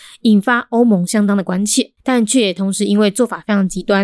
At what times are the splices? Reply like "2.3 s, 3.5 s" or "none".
2.0 s